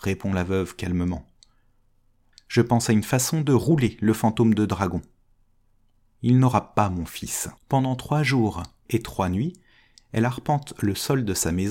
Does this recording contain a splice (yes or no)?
yes